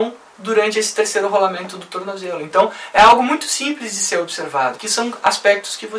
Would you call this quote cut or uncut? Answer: cut